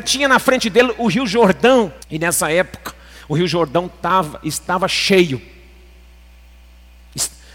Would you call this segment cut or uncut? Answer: cut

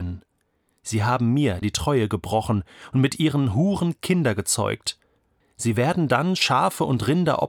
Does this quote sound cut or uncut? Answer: cut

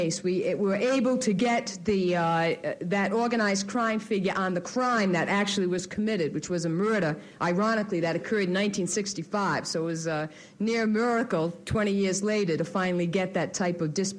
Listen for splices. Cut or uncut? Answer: uncut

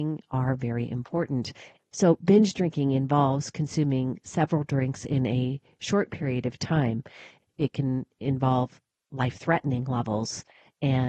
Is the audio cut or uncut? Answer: cut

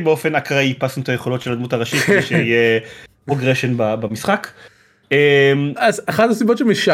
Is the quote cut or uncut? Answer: cut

